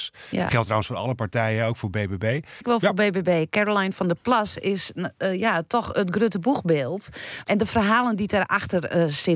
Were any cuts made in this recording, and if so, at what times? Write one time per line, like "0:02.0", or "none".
0:02.6
0:07.4

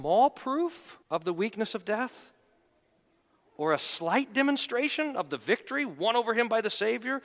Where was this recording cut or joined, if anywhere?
0:01.0

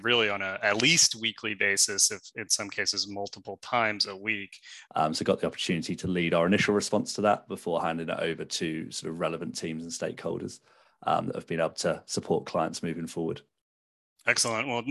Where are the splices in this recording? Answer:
0:04.9

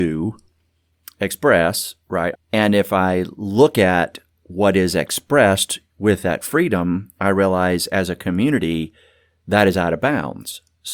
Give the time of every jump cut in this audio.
0:02.3

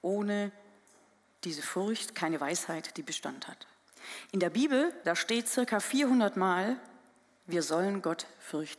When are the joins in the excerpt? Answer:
none

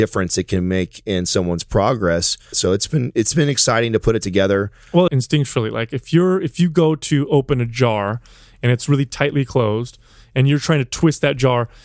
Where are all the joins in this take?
0:02.5
0:05.1

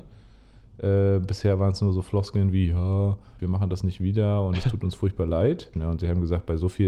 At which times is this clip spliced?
0:03.4
0:05.7

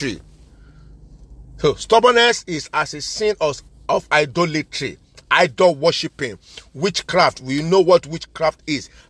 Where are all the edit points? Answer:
none

